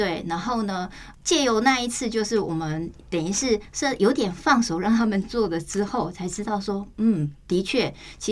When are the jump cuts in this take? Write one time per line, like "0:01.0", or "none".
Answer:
0:01.1